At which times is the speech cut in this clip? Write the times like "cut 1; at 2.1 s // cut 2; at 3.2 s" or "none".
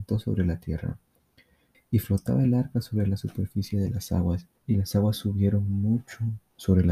cut 1; at 1.7 s // cut 2; at 4.6 s